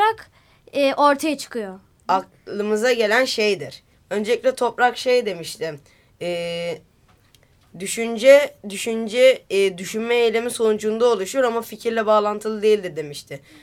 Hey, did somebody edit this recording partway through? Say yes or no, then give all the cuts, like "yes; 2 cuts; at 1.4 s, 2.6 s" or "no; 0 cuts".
yes; 2 cuts; at 2.0 s, 3.9 s